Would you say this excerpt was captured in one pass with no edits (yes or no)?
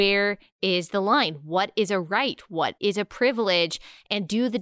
yes